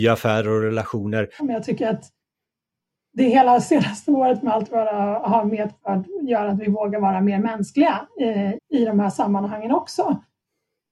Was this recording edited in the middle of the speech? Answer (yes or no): yes